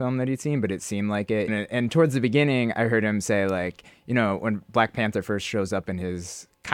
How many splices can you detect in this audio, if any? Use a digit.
1